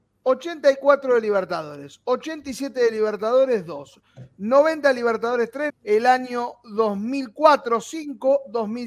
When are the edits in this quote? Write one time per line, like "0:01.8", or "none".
0:05.7